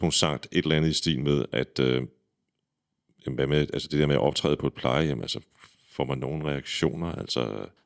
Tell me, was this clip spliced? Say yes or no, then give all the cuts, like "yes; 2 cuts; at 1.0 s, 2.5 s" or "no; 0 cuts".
no; 0 cuts